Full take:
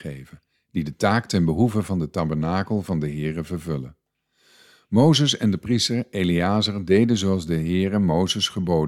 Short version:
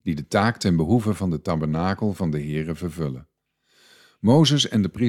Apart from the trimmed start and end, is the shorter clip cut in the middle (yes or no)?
no